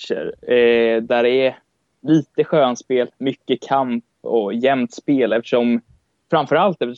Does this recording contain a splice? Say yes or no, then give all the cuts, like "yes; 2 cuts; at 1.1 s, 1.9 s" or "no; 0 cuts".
no; 0 cuts